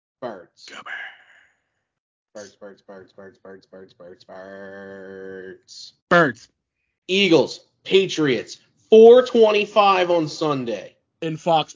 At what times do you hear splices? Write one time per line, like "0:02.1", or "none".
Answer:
0:04.2
0:06.0